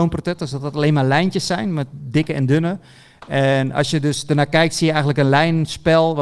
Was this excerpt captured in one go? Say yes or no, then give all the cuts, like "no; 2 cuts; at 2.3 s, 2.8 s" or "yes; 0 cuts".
yes; 0 cuts